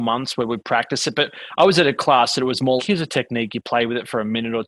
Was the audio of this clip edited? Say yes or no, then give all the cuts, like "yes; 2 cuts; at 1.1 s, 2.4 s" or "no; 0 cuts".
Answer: yes; 1 cut; at 2.8 s